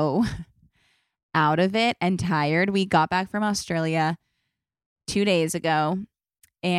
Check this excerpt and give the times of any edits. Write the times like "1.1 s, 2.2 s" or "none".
none